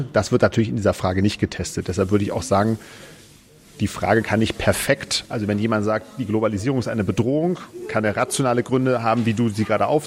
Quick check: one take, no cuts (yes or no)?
yes